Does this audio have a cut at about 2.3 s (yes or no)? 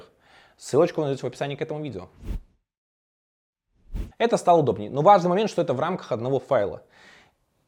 no